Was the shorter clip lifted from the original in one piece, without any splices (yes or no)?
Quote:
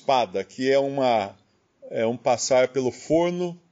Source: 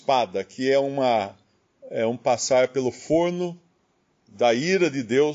yes